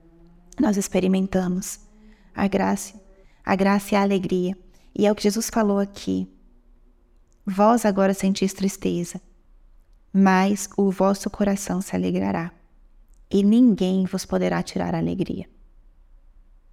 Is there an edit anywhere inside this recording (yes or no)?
yes